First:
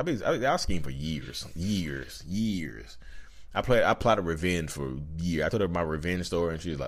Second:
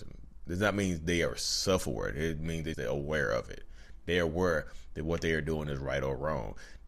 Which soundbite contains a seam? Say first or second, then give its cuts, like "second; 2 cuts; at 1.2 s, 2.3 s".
second; 1 cut; at 2.7 s